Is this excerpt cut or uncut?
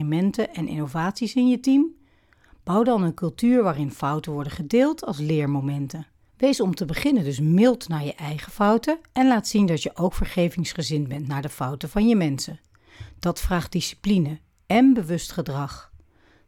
uncut